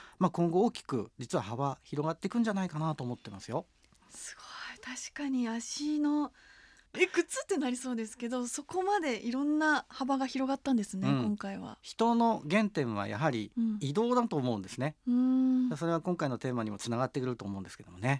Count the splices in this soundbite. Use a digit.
0